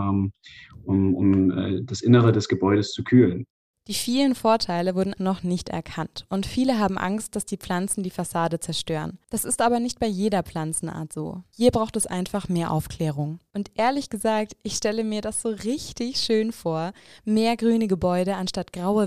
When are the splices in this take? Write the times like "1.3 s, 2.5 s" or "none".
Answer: 5.2 s